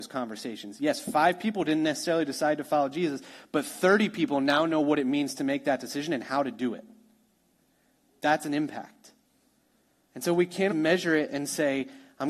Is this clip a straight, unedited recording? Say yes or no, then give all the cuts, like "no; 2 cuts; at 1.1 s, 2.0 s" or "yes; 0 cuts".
no; 1 cut; at 10.7 s